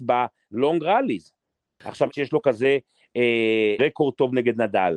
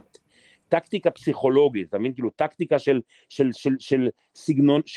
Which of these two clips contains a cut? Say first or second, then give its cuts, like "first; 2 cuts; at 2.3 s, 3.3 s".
first; 2 cuts; at 2.1 s, 3.8 s